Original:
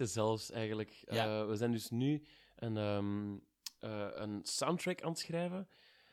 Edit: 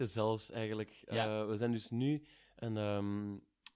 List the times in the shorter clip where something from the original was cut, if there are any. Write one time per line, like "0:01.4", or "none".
none